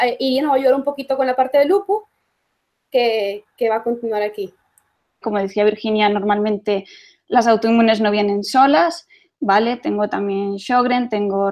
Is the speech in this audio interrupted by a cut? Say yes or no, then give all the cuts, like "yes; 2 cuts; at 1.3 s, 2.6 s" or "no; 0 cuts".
yes; 1 cut; at 5.2 s